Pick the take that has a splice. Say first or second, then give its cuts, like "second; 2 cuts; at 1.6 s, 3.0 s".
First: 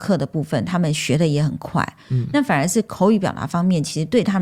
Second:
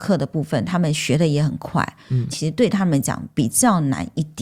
second; 1 cut; at 2.3 s